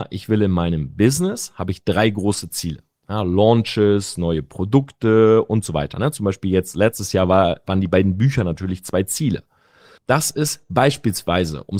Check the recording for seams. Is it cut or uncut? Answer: cut